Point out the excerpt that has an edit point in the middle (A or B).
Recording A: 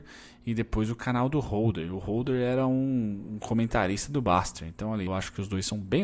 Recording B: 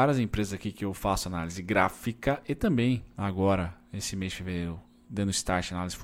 A